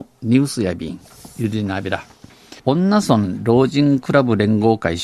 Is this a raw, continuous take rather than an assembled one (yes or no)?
no